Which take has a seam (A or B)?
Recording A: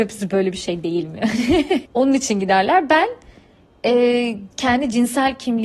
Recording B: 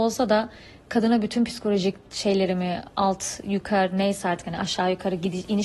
A